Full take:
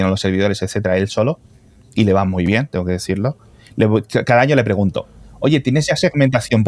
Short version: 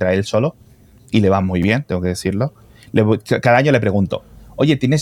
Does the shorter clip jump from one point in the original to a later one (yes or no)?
no